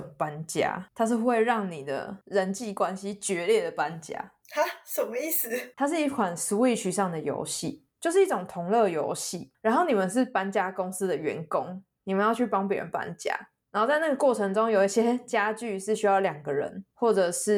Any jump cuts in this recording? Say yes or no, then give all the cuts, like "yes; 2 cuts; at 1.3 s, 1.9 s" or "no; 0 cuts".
yes; 2 cuts; at 5.7 s, 8.0 s